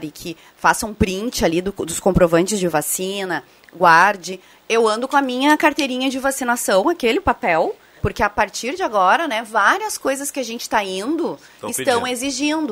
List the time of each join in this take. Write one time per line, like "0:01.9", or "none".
0:04.6
0:08.0